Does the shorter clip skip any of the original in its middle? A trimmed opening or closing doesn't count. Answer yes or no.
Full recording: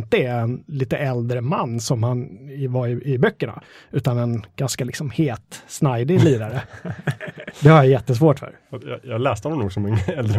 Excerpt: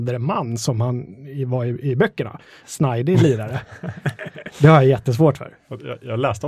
yes